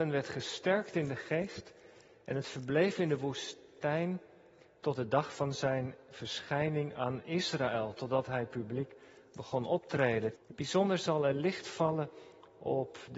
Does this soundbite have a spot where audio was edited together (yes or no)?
yes